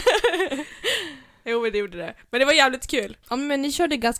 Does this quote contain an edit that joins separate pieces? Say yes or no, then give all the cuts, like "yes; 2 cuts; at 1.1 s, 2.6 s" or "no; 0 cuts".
yes; 1 cut; at 3.2 s